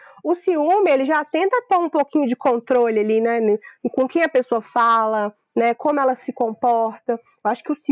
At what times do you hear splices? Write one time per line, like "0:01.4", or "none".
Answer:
none